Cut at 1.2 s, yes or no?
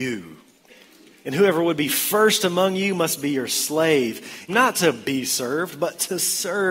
yes